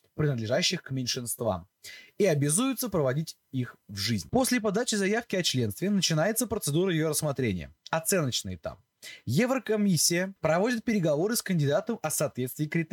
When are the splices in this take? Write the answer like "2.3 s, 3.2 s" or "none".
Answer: 10.4 s